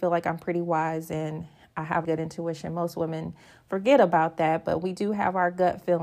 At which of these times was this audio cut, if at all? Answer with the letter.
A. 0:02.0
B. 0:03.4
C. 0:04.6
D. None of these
A